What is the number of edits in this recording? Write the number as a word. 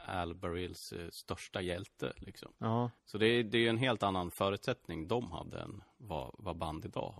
one